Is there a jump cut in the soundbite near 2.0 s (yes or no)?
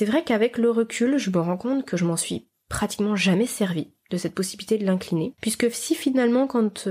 no